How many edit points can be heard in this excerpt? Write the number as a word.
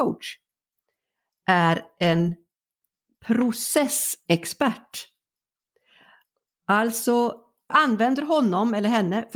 one